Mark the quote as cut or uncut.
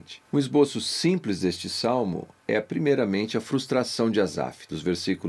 uncut